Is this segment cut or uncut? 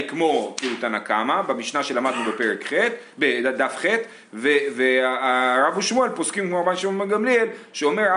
uncut